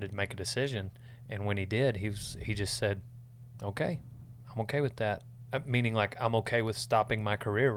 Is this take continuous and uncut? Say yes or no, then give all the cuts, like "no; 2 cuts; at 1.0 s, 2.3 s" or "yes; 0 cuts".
yes; 0 cuts